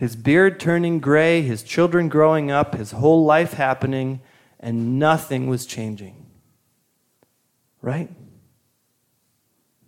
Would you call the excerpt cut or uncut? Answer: uncut